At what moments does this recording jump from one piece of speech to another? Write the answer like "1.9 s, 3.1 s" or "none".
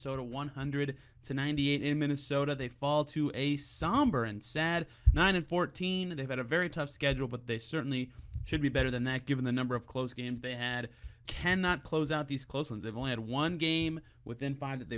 11.3 s